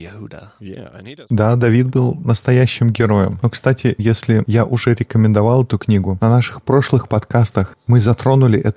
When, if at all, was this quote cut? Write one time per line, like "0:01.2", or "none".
0:04.0
0:06.2